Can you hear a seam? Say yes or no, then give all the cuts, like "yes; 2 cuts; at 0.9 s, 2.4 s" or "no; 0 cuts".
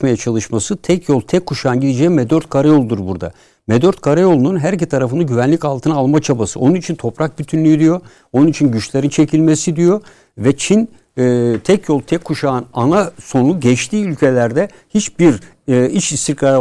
no; 0 cuts